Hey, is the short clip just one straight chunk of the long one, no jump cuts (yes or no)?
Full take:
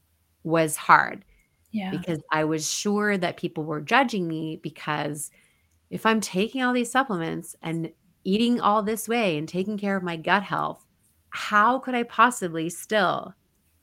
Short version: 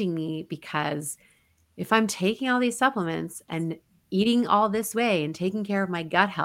yes